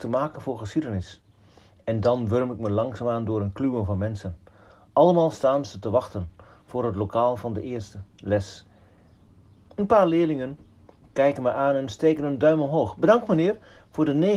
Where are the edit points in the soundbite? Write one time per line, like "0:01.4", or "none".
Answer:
none